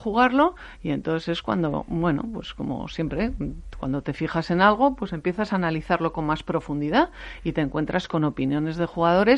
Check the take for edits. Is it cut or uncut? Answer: uncut